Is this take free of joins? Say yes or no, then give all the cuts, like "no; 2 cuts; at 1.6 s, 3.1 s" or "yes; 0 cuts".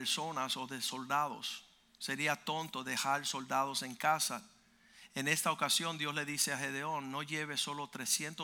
yes; 0 cuts